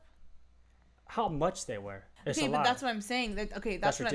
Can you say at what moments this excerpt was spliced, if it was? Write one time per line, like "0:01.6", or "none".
0:02.2